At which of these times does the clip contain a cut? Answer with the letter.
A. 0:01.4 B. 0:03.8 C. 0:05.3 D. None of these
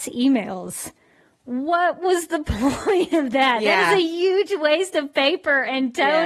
D